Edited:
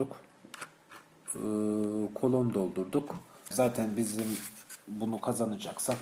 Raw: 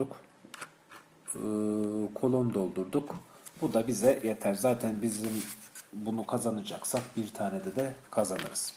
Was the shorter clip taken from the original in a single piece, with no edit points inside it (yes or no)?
no